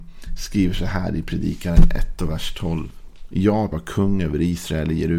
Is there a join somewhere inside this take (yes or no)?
yes